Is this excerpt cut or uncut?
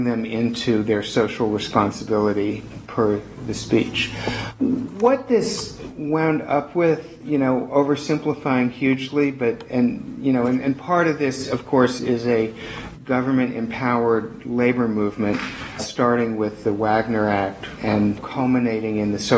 cut